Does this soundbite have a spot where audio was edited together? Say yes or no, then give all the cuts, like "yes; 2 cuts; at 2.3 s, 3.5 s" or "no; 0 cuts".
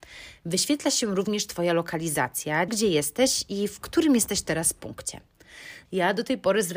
yes; 2 cuts; at 2.7 s, 5.9 s